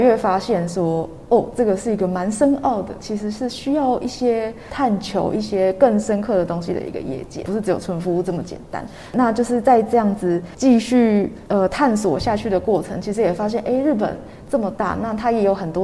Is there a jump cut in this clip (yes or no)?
no